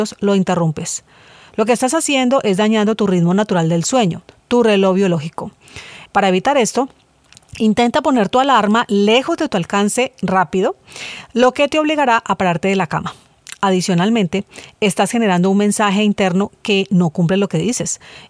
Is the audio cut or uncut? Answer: cut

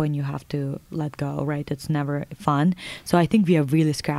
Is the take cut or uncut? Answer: uncut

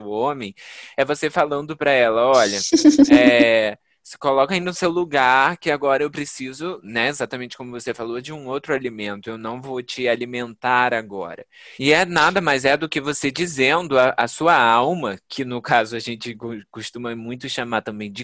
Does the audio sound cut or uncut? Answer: cut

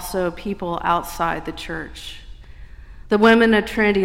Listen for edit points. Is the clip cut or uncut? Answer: cut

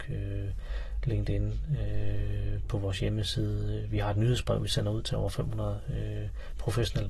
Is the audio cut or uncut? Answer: uncut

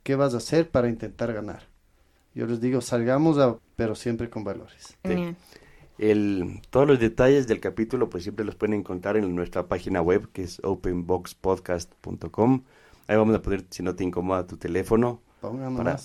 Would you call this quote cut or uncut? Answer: cut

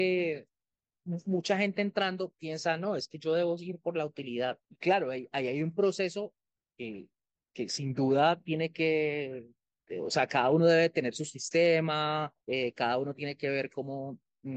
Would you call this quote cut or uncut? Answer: cut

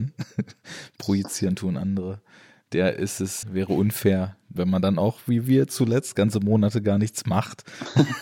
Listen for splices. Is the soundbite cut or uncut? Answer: cut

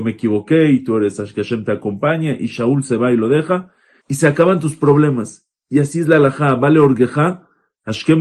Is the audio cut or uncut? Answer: cut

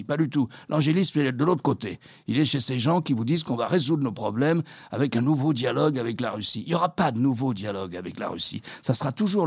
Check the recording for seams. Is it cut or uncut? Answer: uncut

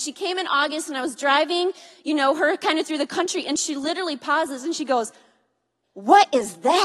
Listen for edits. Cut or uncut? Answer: uncut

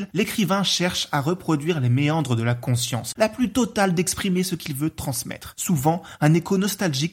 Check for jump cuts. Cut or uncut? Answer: cut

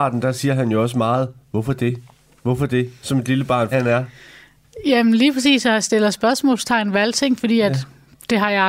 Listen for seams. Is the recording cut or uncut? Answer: cut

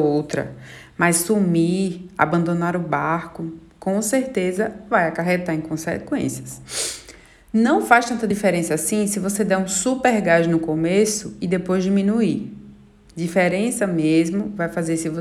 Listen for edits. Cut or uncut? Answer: uncut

